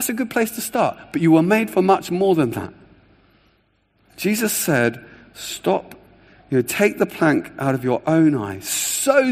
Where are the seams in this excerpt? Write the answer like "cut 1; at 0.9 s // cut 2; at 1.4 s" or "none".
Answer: none